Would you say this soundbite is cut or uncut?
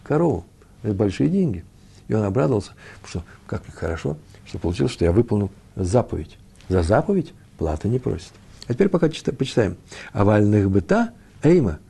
uncut